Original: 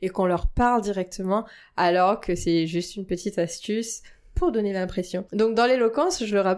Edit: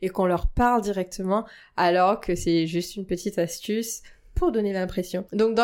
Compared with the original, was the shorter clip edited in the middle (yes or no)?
no